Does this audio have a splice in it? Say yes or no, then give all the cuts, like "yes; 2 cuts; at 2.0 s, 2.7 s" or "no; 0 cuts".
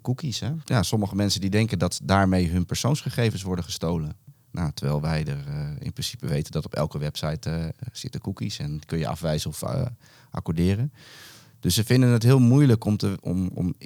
yes; 1 cut; at 4.3 s